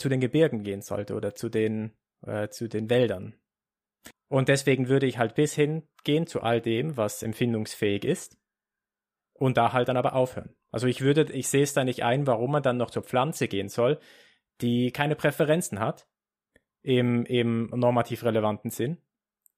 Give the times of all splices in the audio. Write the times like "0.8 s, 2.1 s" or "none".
4.1 s